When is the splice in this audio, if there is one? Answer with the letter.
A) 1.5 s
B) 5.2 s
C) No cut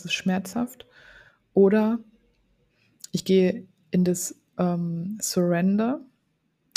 C